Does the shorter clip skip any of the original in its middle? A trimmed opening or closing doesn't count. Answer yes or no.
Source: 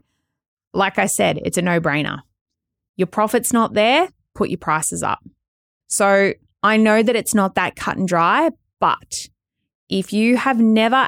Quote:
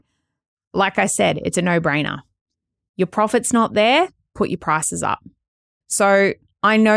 no